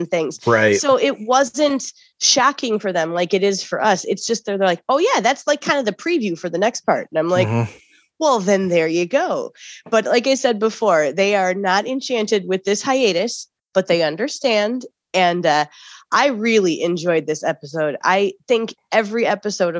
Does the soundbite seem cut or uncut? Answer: uncut